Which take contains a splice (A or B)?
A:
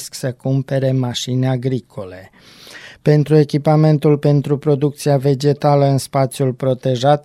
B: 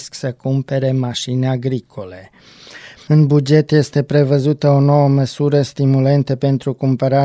B